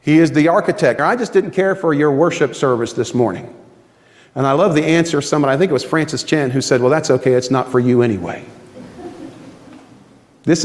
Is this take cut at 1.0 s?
yes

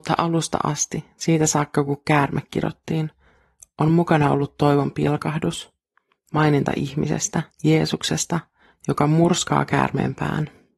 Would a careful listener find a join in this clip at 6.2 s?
no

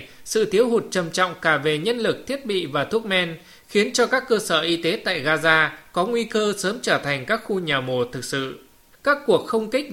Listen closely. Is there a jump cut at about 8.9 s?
yes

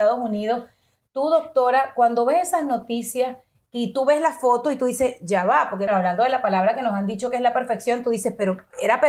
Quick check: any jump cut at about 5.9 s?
yes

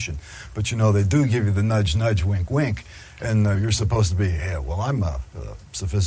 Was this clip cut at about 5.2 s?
no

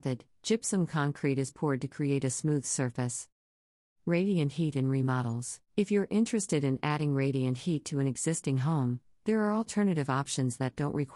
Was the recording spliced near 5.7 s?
yes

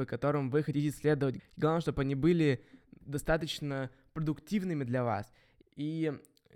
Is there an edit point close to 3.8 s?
no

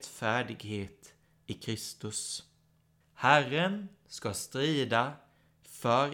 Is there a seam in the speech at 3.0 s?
yes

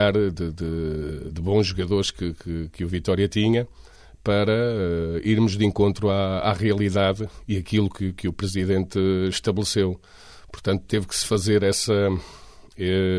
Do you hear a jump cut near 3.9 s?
no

